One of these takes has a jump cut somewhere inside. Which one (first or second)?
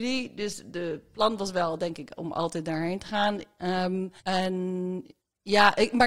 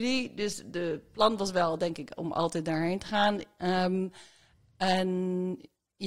first